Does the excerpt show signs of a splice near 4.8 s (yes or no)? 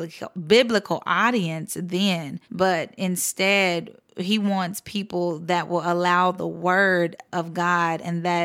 no